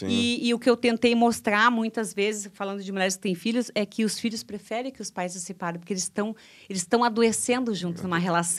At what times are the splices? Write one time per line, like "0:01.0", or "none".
none